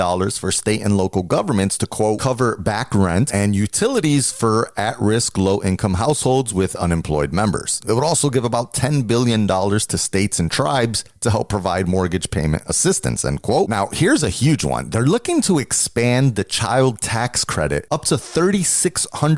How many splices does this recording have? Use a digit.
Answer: 1